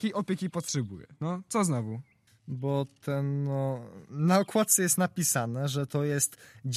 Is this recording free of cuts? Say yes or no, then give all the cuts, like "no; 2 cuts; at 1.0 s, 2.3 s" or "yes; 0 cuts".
no; 1 cut; at 2.3 s